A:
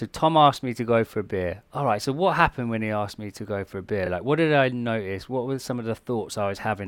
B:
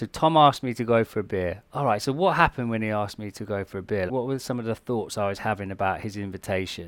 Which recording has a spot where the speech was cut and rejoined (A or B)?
B